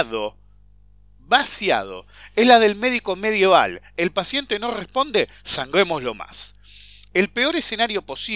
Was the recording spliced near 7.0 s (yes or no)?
no